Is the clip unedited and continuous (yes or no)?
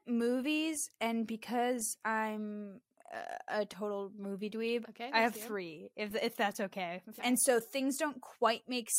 no